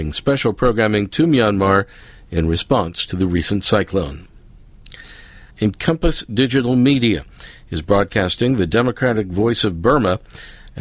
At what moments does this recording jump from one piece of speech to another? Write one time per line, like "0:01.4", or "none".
0:05.5